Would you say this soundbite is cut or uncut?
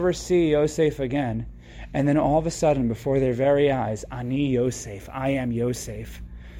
uncut